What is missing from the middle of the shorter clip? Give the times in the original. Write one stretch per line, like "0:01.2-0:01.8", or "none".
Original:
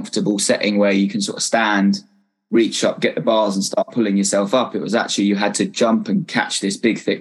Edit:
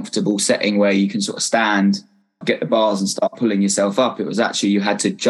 0:02.4-0:03.0